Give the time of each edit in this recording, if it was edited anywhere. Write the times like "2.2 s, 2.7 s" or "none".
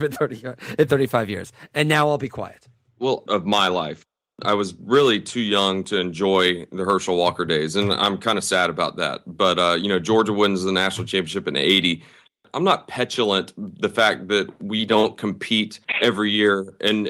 3.3 s